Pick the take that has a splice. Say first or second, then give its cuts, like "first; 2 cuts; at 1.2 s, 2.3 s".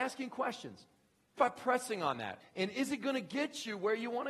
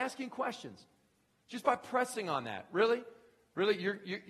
first; 2 cuts; at 1.4 s, 2.4 s